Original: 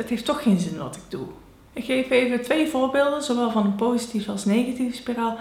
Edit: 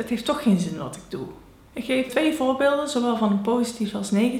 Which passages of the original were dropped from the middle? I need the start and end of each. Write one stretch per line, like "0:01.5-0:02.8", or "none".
0:02.1-0:02.4